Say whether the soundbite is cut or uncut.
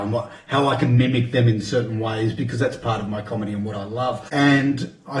cut